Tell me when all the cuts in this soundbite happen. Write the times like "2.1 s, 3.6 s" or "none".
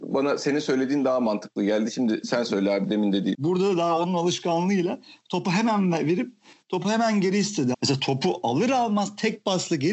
3.3 s, 7.7 s